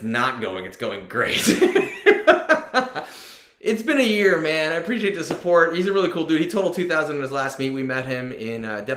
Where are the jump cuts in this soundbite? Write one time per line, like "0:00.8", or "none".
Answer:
none